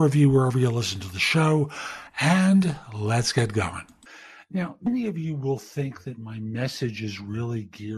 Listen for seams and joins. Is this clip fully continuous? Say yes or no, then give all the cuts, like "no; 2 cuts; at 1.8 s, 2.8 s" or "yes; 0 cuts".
yes; 0 cuts